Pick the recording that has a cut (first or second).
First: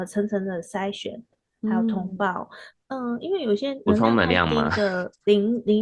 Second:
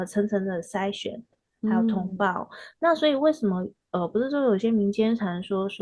first